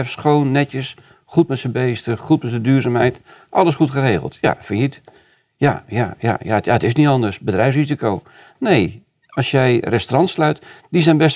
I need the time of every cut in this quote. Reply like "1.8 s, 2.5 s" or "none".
none